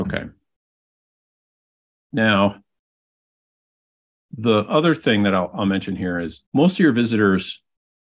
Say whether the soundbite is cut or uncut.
cut